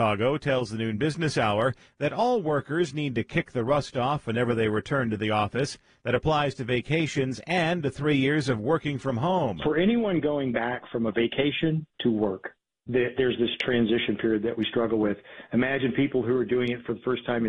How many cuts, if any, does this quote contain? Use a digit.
1